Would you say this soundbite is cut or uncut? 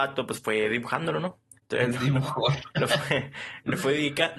cut